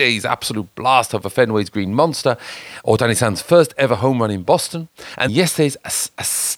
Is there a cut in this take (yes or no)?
yes